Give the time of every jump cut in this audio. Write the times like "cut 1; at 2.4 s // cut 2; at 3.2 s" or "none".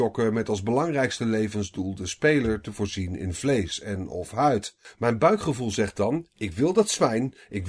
cut 1; at 4.8 s